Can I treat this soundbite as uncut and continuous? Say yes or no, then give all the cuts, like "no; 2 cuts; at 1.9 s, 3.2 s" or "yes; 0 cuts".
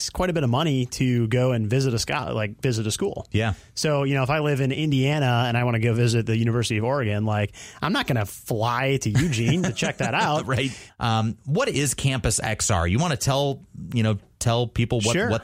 no; 1 cut; at 10.9 s